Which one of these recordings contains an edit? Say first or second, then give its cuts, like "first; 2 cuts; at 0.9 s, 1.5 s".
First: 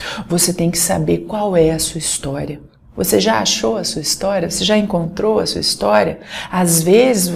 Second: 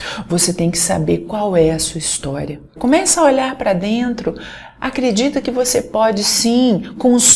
second; 1 cut; at 2.8 s